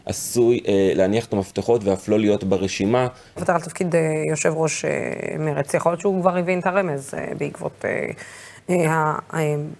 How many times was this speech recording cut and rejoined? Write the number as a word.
one